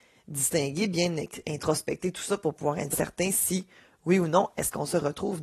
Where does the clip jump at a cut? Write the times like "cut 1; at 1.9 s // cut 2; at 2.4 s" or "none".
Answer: cut 1; at 2.9 s